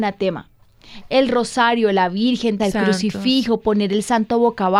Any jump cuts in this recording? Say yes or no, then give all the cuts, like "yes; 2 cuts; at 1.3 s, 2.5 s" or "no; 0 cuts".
yes; 1 cut; at 2.6 s